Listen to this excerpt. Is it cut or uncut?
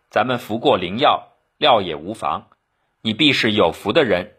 uncut